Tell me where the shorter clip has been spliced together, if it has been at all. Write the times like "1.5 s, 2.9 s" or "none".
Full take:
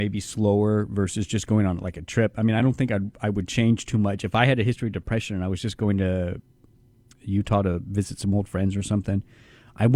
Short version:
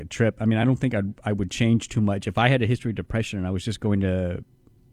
none